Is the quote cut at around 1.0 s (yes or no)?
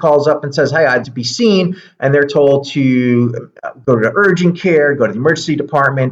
yes